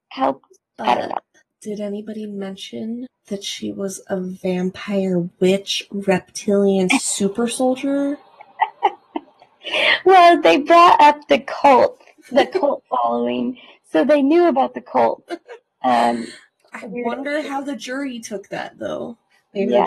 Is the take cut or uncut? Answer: uncut